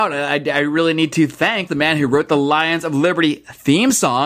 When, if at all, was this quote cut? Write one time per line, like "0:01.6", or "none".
0:01.7